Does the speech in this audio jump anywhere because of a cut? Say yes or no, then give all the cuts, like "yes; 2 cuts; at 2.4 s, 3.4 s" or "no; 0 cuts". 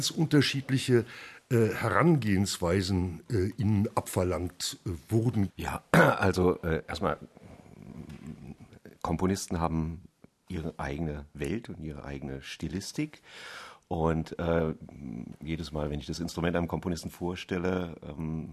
yes; 1 cut; at 5.5 s